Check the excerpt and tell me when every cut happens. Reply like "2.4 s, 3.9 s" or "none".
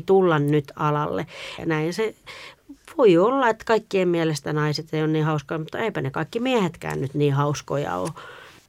1.6 s